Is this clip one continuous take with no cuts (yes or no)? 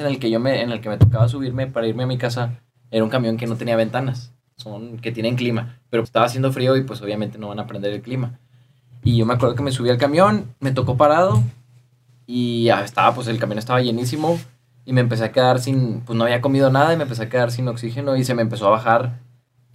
no